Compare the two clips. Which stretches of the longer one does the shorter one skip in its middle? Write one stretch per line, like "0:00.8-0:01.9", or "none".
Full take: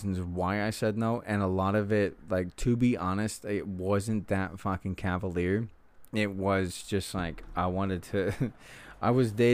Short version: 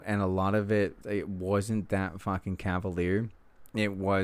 0:02.2-0:03.4